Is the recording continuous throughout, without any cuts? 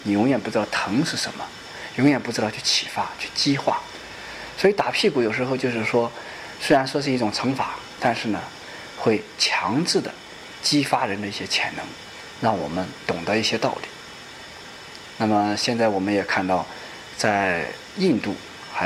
yes; 0 cuts

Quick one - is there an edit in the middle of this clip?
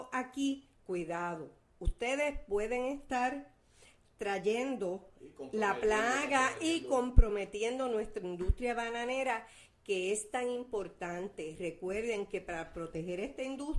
no; 0 cuts

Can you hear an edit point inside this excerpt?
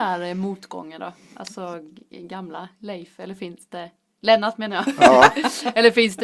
no; 0 cuts

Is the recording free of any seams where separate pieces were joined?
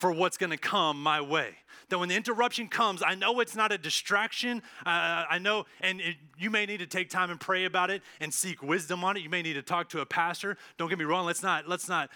yes; 0 cuts

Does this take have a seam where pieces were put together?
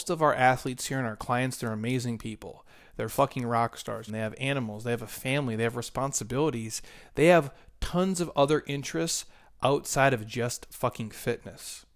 yes; 1 cut; at 4.1 s

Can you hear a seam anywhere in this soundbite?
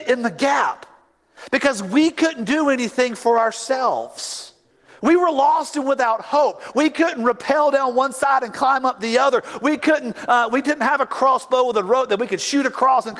yes; 1 cut; at 6.7 s

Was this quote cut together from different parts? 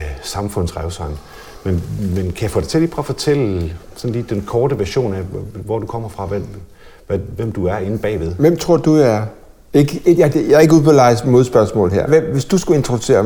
yes; 2 cuts; at 10.3 s, 12.1 s

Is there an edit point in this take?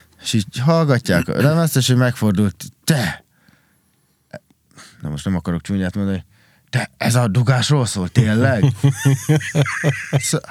no; 0 cuts

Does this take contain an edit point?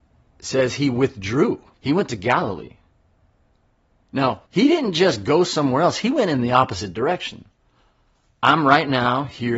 yes; 2 cuts; at 1.7 s, 4.5 s

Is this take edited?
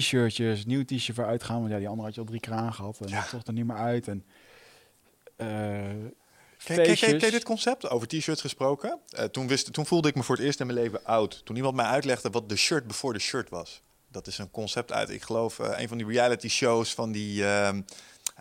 no; 0 cuts

